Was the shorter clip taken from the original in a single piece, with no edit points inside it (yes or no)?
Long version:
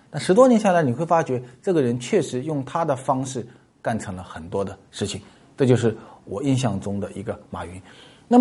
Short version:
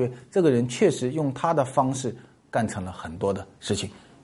yes